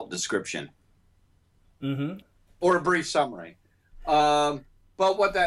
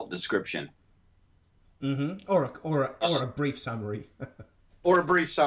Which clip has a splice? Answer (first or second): first